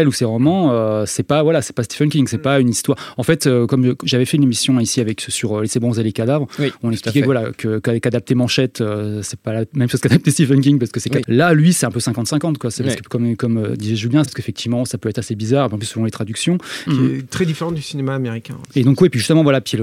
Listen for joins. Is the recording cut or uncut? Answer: cut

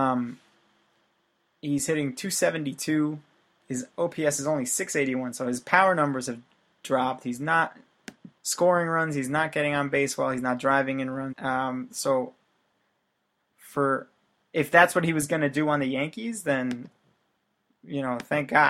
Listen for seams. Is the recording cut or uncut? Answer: cut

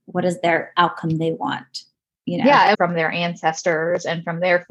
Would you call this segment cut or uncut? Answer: cut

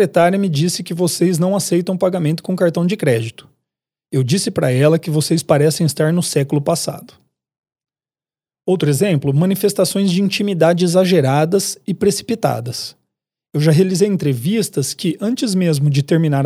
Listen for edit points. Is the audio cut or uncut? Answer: uncut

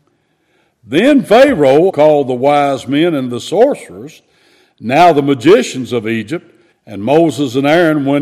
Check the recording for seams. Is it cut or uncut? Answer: cut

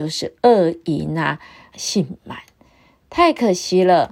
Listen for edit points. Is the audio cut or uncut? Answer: cut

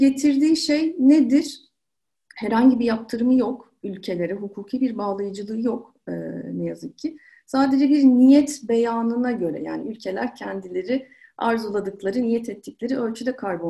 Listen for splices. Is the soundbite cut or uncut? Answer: uncut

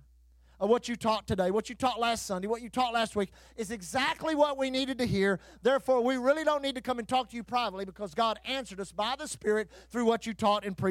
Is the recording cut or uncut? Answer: uncut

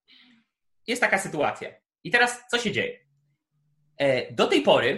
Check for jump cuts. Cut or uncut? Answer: cut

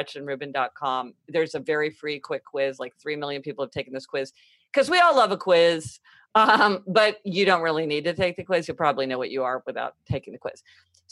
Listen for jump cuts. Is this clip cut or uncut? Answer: uncut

